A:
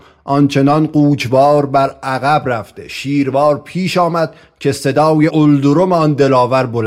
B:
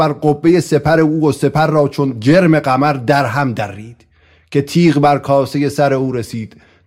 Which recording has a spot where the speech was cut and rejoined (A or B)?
A